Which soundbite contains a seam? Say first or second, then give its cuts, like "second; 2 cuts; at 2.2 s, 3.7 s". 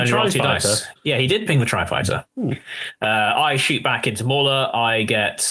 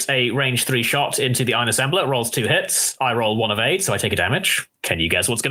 first; 1 cut; at 2.3 s